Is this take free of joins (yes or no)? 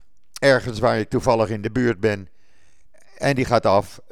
yes